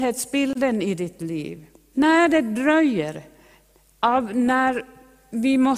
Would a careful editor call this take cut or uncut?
cut